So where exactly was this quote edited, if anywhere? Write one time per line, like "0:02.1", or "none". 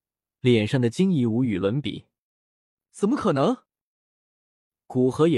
none